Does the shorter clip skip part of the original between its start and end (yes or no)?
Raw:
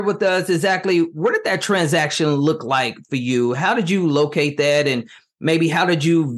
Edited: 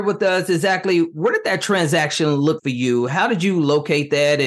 yes